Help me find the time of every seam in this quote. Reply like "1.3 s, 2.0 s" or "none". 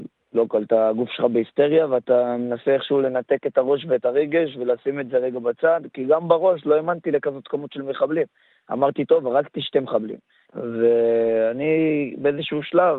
10.5 s